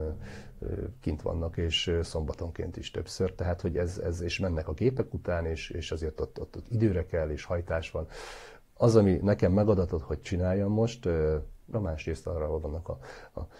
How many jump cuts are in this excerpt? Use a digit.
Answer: 2